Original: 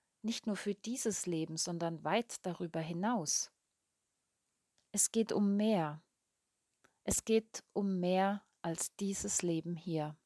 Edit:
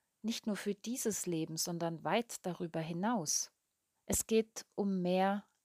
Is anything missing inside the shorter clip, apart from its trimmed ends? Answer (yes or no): yes